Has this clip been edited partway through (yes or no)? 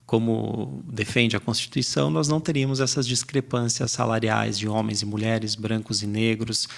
no